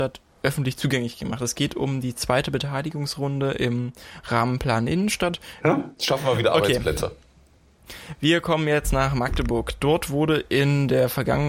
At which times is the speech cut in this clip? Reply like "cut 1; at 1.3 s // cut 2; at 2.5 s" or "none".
cut 1; at 5.6 s